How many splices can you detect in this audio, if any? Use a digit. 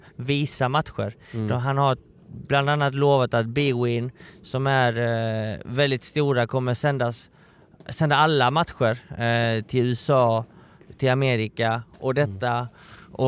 0